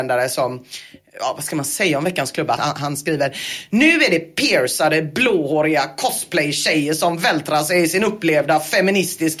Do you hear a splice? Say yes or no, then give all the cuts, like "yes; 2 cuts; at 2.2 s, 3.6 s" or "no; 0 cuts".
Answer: yes; 1 cut; at 2.6 s